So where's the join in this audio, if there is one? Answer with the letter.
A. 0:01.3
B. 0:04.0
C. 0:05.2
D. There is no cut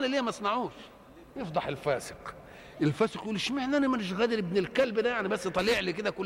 A